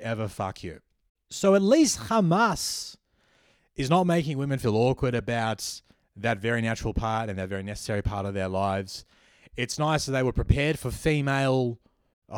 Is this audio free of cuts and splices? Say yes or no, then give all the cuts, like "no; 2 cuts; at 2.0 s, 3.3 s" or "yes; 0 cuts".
yes; 0 cuts